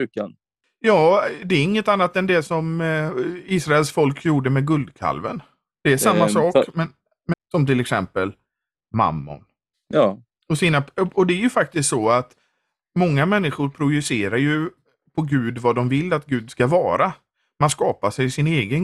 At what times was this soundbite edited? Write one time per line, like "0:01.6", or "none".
0:07.3
0:09.7